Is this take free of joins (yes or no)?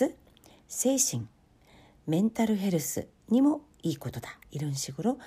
no